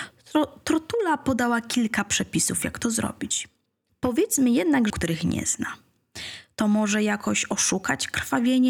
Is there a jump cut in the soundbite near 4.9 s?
yes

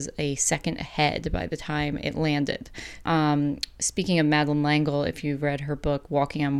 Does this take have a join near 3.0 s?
yes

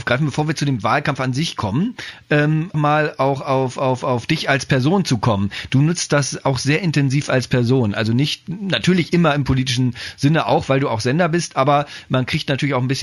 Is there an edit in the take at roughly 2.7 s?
yes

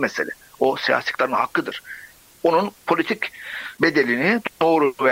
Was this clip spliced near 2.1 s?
no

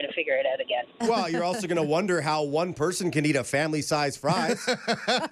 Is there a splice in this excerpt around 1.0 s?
no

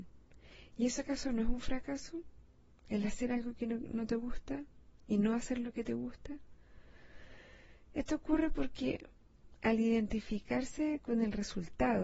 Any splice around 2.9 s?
no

